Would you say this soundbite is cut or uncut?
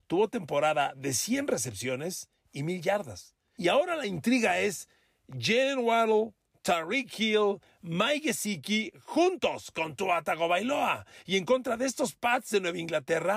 uncut